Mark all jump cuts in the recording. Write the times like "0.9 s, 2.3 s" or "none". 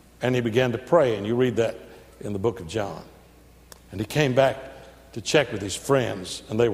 none